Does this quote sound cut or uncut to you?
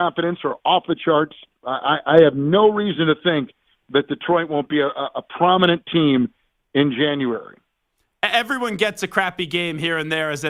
cut